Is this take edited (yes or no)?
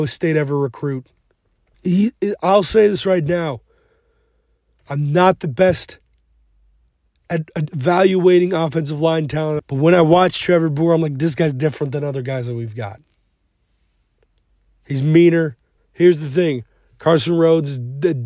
yes